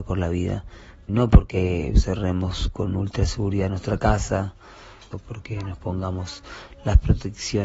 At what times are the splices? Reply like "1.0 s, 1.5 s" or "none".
1.1 s, 5.1 s